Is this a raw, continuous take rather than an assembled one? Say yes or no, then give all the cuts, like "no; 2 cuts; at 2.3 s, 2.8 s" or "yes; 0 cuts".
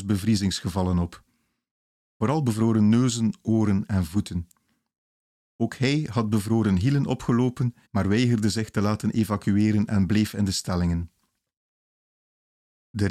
no; 2 cuts; at 5.4 s, 7.9 s